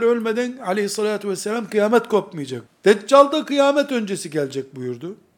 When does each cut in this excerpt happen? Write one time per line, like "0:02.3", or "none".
0:02.7

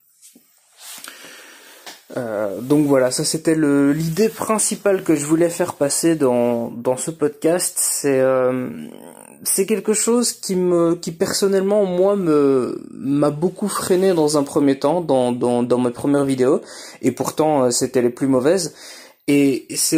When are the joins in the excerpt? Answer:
none

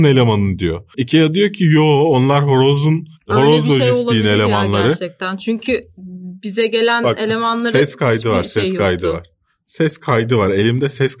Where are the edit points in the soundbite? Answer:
0:00.9

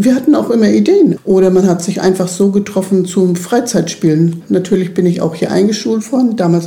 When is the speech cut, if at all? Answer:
0:01.2
0:04.4

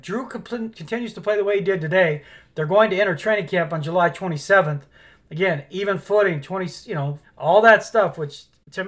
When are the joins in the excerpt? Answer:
0:07.2

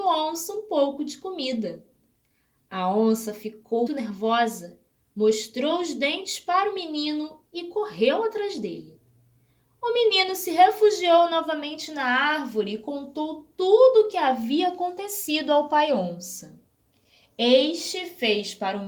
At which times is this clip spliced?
0:03.9

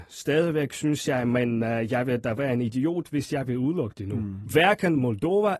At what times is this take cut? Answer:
0:04.5

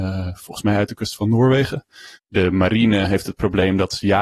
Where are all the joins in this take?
0:02.2

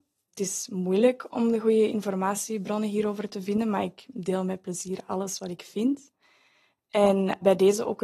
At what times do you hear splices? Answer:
none

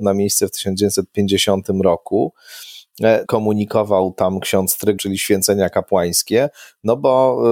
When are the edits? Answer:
0:03.2
0:05.0

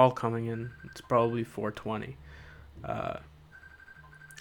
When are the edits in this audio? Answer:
none

